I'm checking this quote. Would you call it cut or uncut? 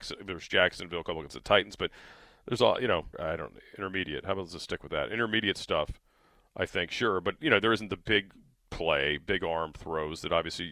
cut